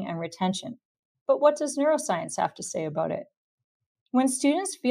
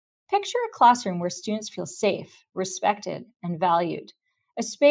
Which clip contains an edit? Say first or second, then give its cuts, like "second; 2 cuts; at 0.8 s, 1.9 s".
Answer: first; 1 cut; at 1.1 s